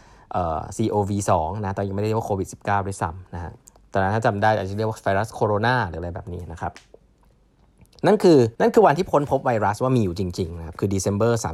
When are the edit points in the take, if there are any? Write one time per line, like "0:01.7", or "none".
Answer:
0:08.5

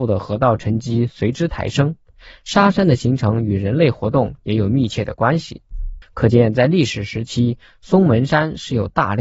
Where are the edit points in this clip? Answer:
0:06.0

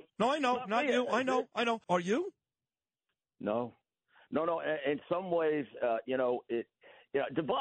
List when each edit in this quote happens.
0:01.8

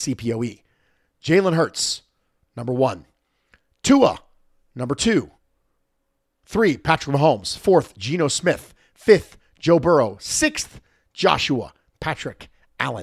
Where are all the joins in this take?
none

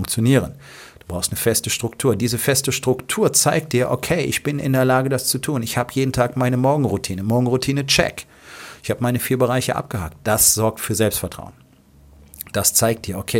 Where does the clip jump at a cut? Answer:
none

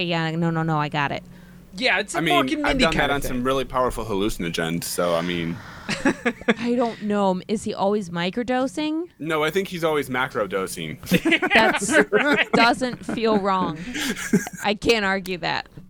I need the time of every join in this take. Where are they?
none

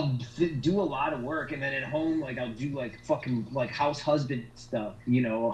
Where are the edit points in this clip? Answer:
none

